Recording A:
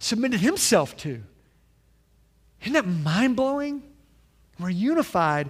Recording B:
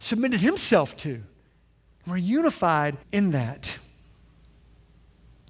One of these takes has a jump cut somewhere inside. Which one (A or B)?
B